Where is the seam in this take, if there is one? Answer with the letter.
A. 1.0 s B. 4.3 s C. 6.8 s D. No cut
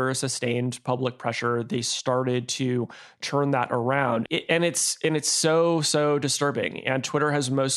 B